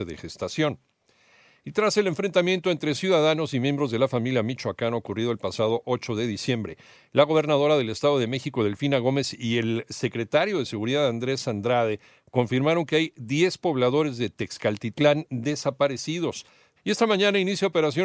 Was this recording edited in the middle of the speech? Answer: yes; 1 cut; at 16.8 s

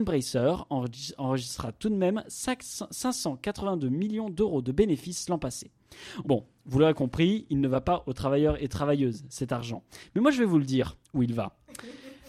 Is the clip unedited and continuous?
no; 1 cut; at 6.2 s

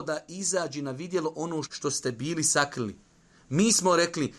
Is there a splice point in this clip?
yes; 1 cut; at 1.6 s

